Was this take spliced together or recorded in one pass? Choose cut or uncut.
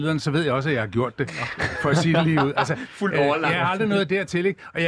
uncut